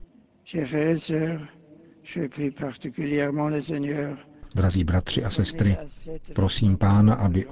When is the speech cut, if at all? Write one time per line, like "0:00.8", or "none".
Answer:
none